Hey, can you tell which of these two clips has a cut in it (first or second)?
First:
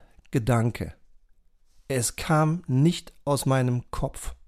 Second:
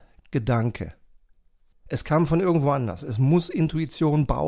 second